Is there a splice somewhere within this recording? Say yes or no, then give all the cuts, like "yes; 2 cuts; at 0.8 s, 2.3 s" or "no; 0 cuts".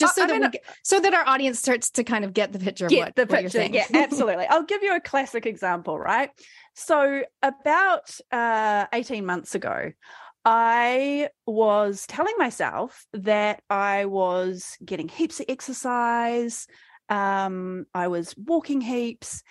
no; 0 cuts